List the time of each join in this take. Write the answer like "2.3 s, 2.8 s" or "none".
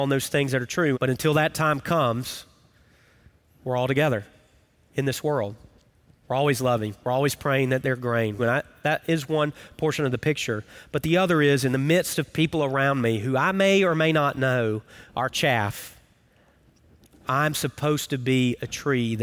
0.9 s, 6.2 s, 8.4 s